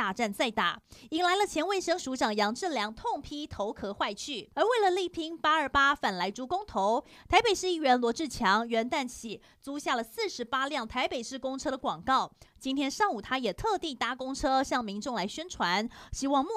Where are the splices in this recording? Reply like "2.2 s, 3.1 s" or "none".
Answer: 4.5 s